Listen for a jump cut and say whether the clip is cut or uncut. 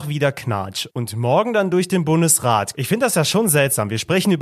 cut